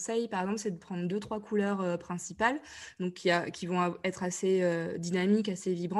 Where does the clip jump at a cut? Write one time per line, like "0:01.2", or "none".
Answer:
none